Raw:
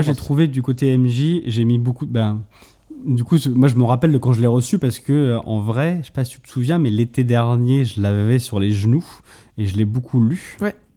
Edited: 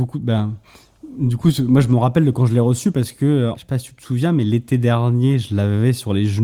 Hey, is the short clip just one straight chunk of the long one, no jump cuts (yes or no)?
no